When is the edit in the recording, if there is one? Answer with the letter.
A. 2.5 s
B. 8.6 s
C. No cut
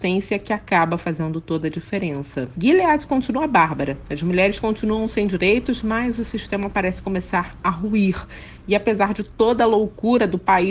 A